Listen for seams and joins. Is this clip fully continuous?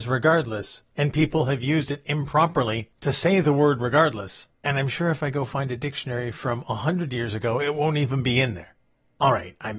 no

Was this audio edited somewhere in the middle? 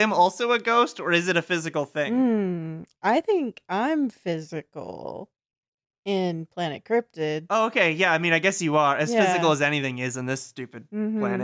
no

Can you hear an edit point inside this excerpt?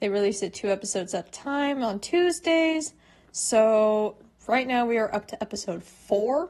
no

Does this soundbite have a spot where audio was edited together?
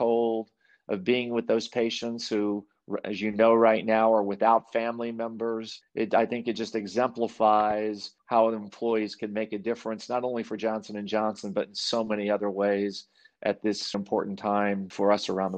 yes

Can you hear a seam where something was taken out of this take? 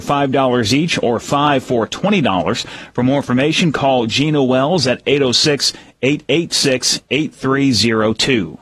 no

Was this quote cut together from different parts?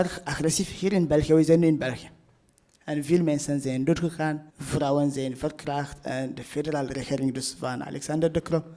yes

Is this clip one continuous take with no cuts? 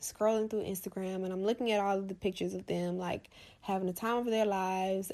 yes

